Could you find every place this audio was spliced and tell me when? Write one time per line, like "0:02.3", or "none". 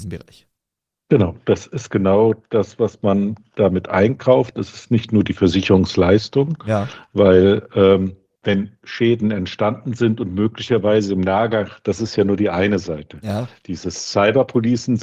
0:11.8